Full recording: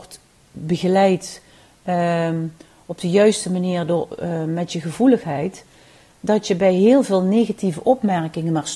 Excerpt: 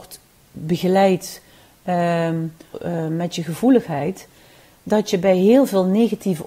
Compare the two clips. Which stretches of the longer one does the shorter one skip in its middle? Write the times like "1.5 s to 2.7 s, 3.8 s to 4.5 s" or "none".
2.7 s to 4.1 s